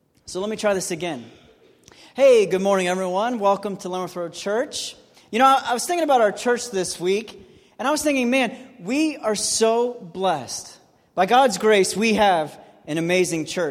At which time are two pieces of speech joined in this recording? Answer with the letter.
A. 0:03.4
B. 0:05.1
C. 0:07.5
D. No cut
D